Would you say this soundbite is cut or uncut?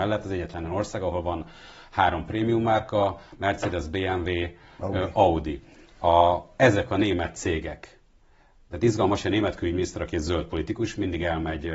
uncut